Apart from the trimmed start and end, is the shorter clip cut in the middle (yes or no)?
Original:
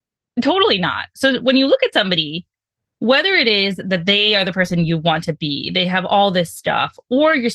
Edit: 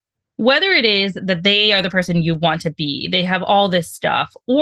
no